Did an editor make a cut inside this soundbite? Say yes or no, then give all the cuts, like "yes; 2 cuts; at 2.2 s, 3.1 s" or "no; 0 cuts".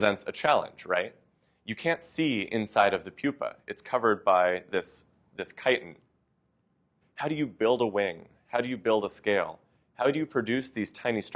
yes; 1 cut; at 7.0 s